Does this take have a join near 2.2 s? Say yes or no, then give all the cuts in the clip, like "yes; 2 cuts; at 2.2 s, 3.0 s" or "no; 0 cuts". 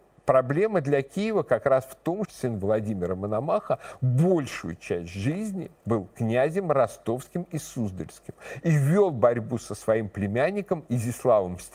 yes; 1 cut; at 2.2 s